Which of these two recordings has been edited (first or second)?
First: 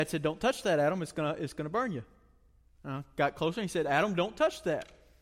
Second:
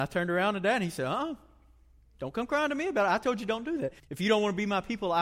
second